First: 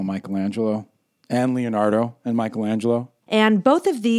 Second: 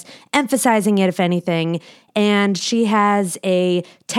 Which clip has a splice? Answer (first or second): first